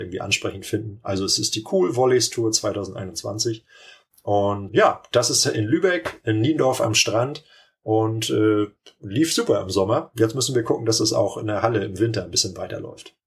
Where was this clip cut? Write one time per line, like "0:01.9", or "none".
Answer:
0:04.7